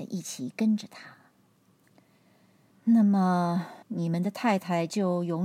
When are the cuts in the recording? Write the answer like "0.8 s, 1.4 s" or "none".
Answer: 2.7 s, 3.8 s

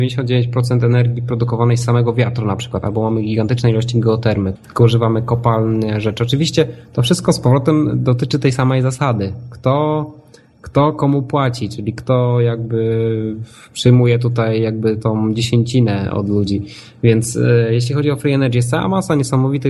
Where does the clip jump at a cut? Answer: 4.6 s

